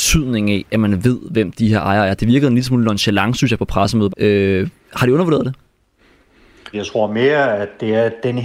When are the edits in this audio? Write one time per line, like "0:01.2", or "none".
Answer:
0:04.1
0:06.7